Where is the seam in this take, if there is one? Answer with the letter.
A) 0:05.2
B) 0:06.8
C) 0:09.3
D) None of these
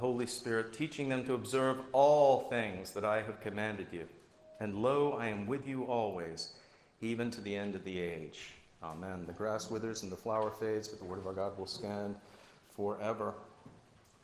D